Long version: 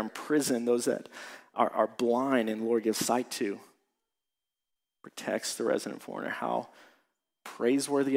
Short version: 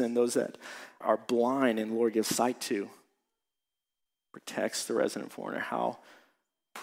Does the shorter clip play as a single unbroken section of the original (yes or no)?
no